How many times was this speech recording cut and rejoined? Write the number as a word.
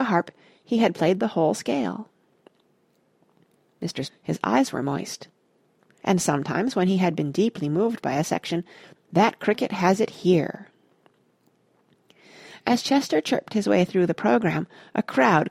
three